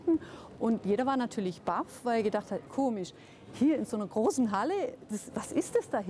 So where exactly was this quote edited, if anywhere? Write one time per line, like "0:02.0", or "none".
0:02.7